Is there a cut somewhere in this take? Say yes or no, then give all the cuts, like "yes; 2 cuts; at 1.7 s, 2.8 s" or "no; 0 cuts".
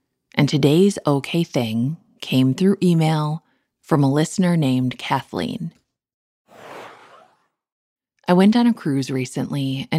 no; 0 cuts